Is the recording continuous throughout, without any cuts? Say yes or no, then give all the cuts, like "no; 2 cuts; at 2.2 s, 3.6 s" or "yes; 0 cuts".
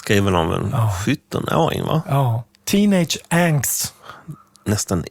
yes; 0 cuts